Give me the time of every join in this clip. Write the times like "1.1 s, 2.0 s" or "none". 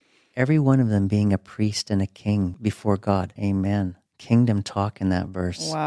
3.4 s

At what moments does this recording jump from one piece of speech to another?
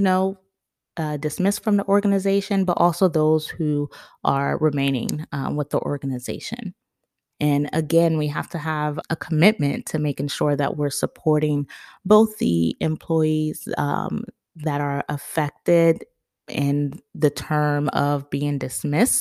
7.3 s, 9.0 s

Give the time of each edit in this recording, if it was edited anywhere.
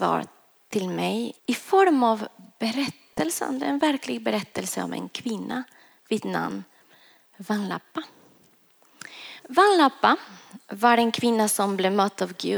1.4 s, 9.4 s

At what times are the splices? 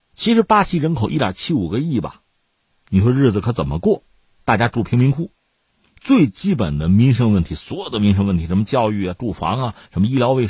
2.7 s

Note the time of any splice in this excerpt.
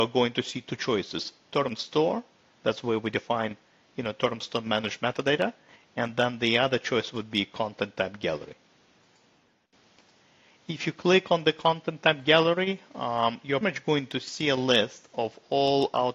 13.6 s

